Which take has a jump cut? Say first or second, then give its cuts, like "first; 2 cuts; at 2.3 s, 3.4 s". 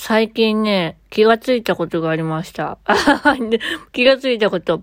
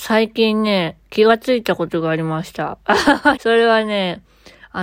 second; 1 cut; at 3.4 s